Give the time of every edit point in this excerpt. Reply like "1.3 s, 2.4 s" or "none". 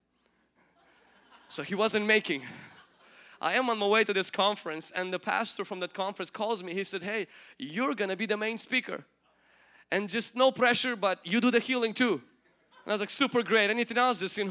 none